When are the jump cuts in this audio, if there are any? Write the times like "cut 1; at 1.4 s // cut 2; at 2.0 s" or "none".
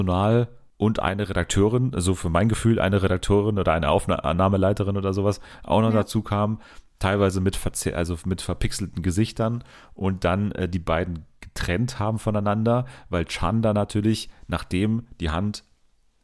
none